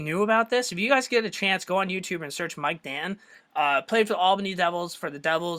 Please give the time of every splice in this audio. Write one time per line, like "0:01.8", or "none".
0:03.4